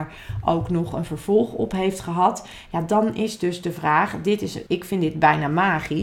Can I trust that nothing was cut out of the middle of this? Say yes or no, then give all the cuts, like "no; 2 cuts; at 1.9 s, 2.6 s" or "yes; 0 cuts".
no; 2 cuts; at 2.7 s, 4.7 s